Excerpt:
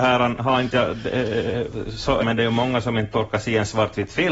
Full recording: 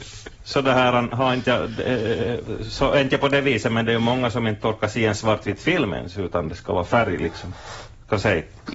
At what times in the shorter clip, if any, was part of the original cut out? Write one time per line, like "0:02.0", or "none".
0:02.2